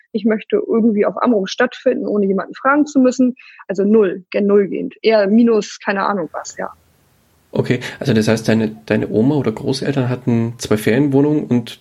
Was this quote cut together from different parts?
yes; 1 cut; at 3.7 s

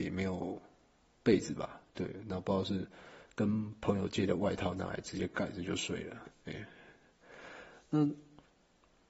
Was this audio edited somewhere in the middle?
no; 0 cuts

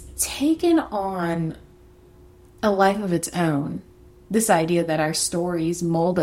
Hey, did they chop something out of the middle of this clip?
no; 0 cuts

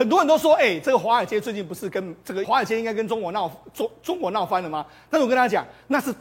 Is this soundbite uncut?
no; 1 cut; at 2.4 s

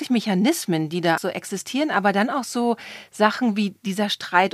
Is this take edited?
yes; 1 cut; at 1.2 s

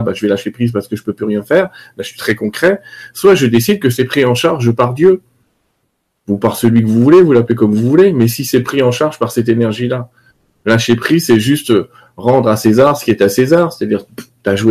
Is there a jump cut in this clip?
no; 0 cuts

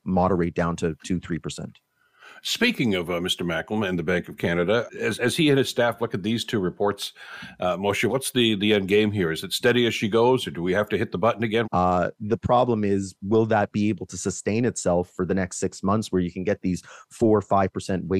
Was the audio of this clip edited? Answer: yes; 3 cuts; at 4.9 s, 8.1 s, 11.6 s

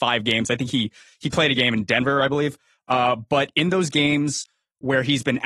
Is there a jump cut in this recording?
no; 0 cuts

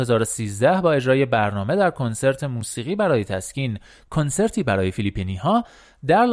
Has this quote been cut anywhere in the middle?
no; 0 cuts

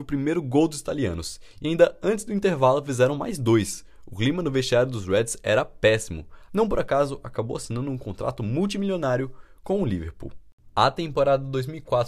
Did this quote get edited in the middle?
yes; 1 cut; at 6.5 s

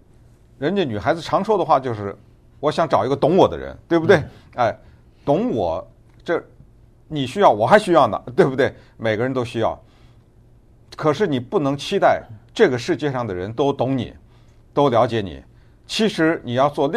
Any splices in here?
no; 0 cuts

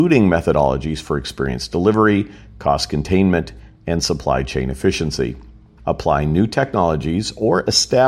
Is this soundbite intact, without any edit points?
no; 1 cut; at 5.8 s

